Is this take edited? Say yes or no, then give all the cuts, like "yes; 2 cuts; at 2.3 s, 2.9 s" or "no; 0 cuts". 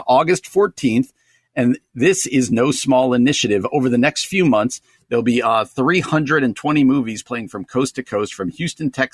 no; 0 cuts